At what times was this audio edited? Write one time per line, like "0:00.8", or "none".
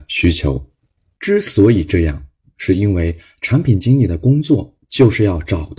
0:01.2